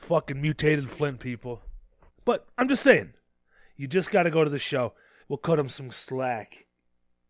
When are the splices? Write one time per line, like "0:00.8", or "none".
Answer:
0:02.1
0:05.2